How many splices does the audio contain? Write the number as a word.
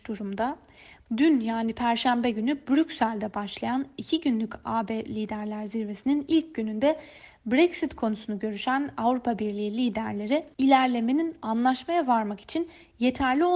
two